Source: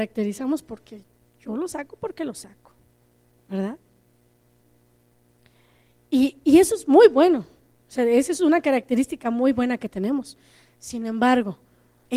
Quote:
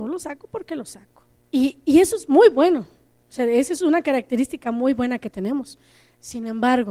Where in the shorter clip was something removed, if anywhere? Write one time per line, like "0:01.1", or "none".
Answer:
0:01.4